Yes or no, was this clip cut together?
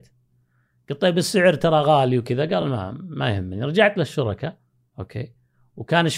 no